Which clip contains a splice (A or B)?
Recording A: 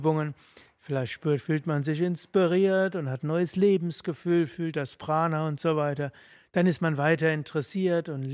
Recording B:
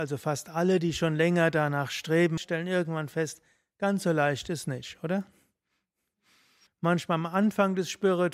B